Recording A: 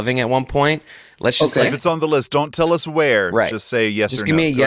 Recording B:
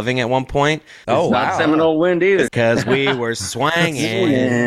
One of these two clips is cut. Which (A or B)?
B